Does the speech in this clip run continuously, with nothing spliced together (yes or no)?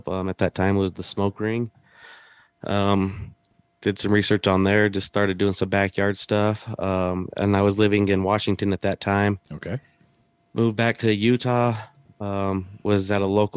yes